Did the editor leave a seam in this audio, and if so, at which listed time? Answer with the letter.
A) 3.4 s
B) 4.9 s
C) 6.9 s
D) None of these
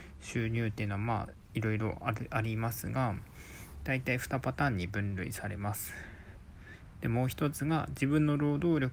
C